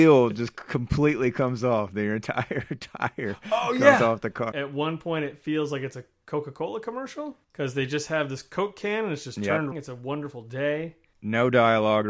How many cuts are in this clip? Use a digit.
2